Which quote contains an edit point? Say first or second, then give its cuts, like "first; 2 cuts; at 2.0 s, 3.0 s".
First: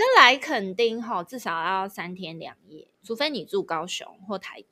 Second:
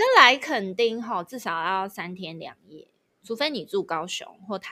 first; 1 cut; at 2.9 s